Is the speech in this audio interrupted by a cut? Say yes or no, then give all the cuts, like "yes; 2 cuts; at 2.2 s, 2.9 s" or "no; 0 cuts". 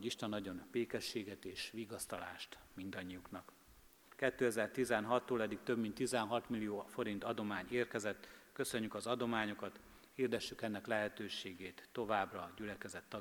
yes; 1 cut; at 4.1 s